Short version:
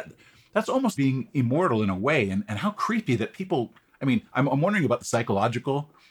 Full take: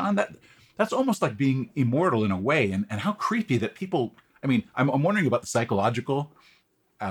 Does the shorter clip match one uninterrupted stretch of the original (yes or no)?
no